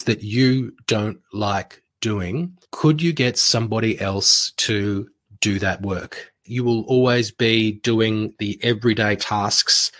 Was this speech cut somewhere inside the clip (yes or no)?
yes